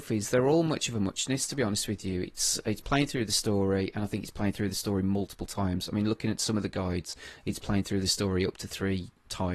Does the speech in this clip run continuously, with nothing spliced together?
yes; 0 cuts

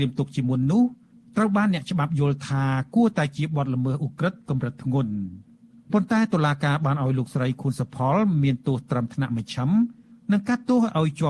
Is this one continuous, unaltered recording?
yes; 0 cuts

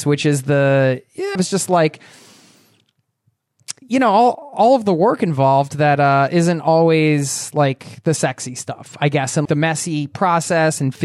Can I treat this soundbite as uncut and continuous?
no; 2 cuts; at 1.4 s, 9.5 s

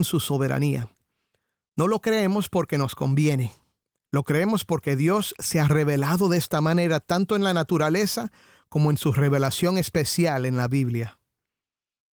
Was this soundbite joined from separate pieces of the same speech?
no; 0 cuts

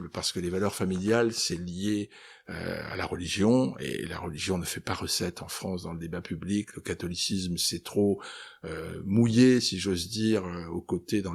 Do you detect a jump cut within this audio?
no; 0 cuts

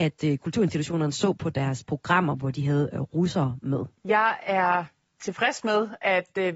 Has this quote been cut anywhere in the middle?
yes; 1 cut; at 4.0 s

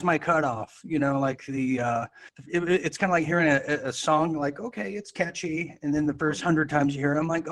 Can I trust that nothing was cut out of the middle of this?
yes; 0 cuts

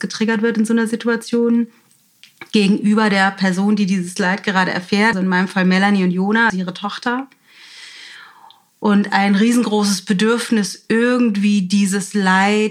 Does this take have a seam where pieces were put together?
yes; 2 cuts; at 5.1 s, 6.5 s

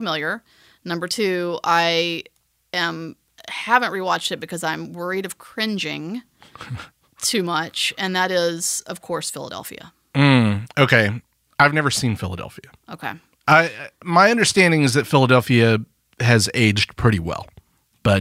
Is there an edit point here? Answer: no; 0 cuts

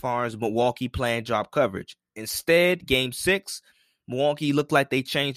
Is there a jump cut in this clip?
no; 0 cuts

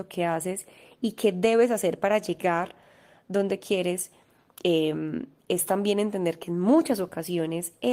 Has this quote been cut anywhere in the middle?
no; 0 cuts

